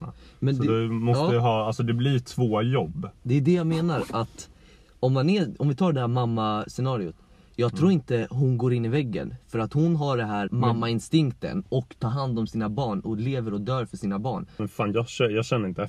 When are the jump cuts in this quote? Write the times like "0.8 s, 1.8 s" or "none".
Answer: 10.5 s, 14.6 s